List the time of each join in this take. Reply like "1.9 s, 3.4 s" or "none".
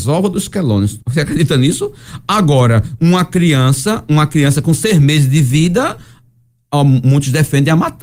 1.0 s